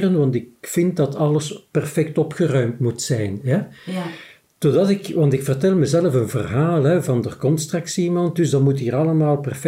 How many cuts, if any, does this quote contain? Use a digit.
0